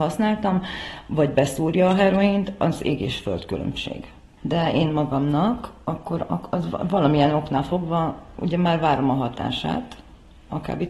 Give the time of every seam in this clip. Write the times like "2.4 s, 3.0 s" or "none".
4.4 s

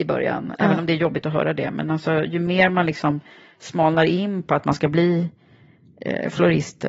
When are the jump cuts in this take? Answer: none

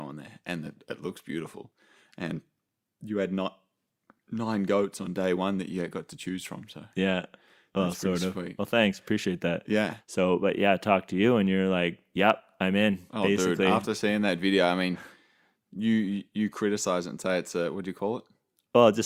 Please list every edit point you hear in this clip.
10.0 s

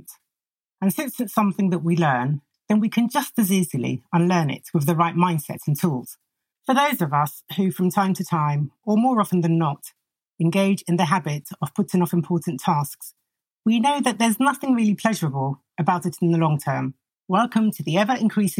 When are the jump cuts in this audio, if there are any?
6.5 s, 17.1 s

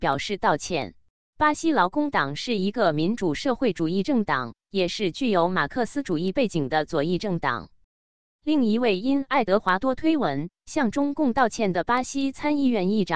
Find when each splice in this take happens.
1.3 s, 8.3 s

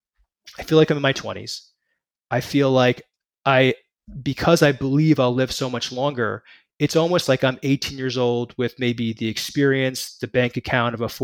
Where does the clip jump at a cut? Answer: none

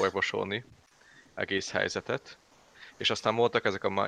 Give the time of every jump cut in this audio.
none

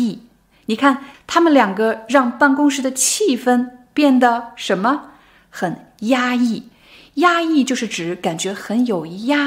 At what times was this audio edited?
1.1 s

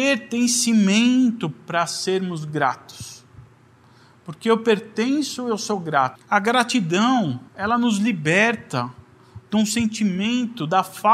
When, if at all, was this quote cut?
6.2 s, 7.5 s

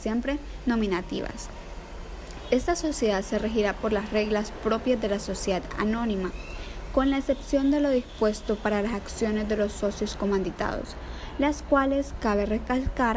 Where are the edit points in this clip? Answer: none

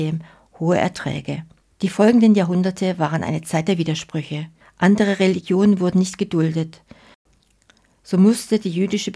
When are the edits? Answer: 1.6 s, 4.6 s

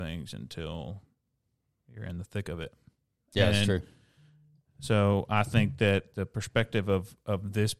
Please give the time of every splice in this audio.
none

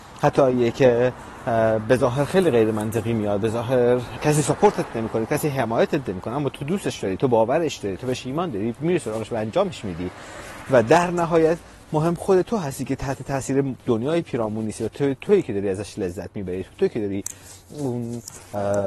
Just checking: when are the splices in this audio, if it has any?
4.1 s

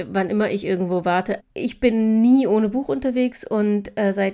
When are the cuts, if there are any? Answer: 1.4 s

